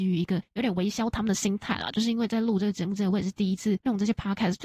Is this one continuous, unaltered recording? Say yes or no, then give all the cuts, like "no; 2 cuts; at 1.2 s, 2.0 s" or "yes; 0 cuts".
yes; 0 cuts